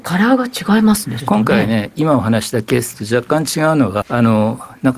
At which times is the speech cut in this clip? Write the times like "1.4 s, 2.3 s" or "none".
1.2 s, 4.0 s